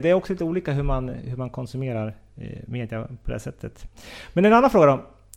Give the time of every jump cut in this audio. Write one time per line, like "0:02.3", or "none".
none

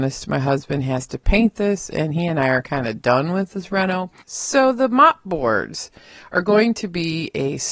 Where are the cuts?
0:04.2

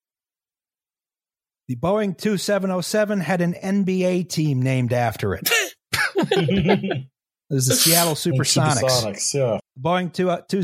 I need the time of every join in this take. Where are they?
0:09.6

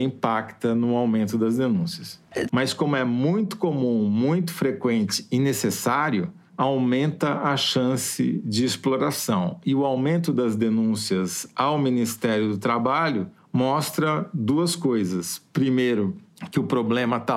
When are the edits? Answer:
0:02.5

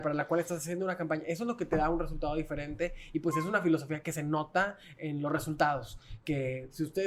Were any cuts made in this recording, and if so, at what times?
0:05.0

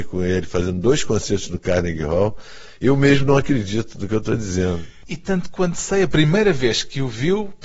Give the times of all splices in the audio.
none

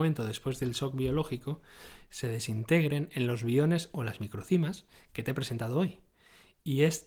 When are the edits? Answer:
none

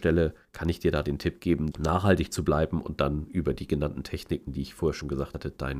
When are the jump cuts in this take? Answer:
0:01.7

